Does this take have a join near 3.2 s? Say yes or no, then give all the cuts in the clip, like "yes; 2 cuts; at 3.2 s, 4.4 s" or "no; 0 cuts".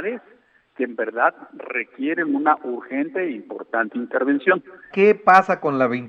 no; 1 cut; at 4.9 s